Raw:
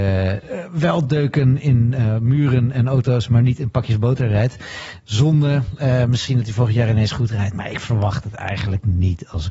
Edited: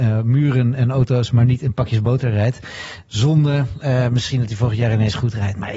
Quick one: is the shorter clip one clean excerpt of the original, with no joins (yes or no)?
yes